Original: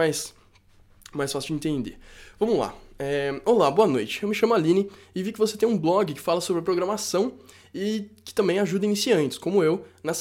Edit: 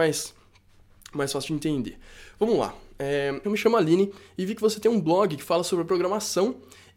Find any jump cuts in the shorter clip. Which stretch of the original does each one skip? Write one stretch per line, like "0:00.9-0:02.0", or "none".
0:03.4-0:04.2